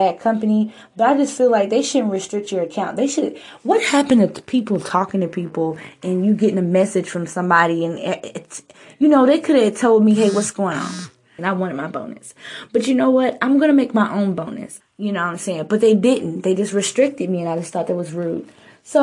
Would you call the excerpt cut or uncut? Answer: cut